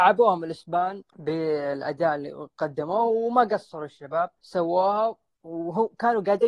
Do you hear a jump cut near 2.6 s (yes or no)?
no